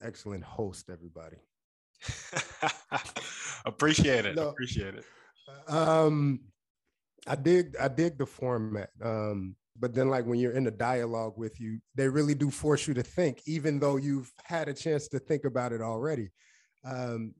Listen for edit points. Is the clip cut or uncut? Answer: cut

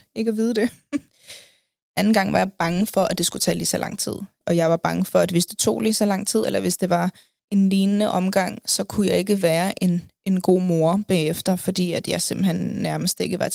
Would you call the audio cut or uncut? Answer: uncut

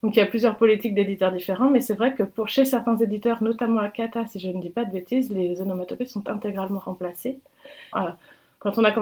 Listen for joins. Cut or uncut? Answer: cut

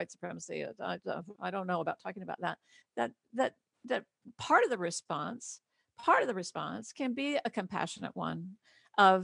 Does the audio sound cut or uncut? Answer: cut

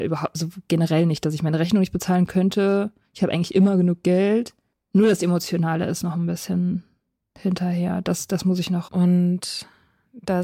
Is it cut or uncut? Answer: cut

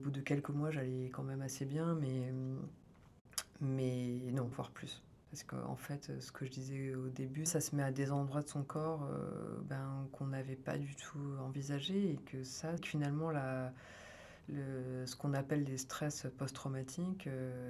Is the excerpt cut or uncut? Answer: cut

